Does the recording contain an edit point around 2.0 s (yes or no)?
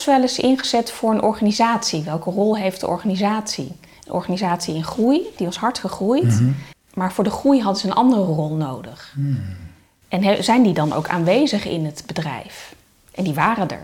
no